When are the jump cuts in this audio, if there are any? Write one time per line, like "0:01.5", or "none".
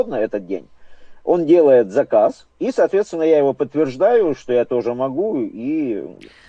0:02.5